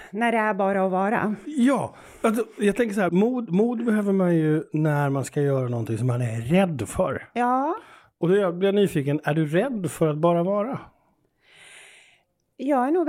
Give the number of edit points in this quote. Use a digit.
1